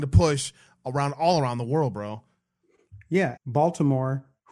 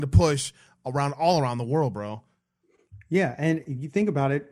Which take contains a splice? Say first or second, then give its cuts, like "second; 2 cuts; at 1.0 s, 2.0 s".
first; 1 cut; at 3.4 s